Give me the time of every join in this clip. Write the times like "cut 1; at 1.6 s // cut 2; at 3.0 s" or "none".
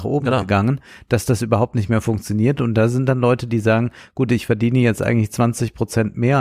none

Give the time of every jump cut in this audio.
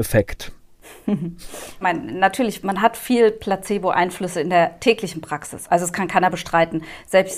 cut 1; at 1.8 s // cut 2; at 5.7 s

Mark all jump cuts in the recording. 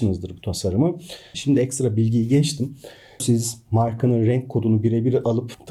cut 1; at 1.3 s // cut 2; at 3.2 s

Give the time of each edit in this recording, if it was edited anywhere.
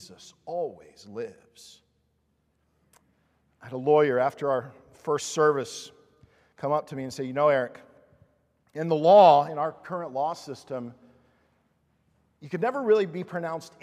none

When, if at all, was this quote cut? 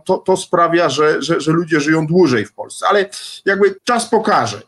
cut 1; at 3.8 s

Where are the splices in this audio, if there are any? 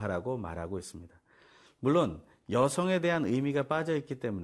cut 1; at 1.7 s

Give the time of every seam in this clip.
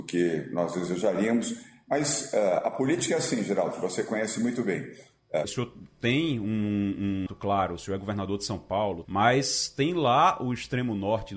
cut 1; at 5.4 s // cut 2; at 7.3 s // cut 3; at 9.0 s

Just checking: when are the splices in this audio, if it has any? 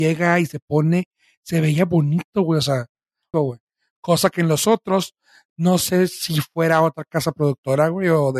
cut 1; at 3.3 s

